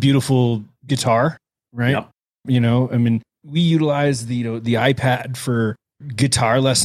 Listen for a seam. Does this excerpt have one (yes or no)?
no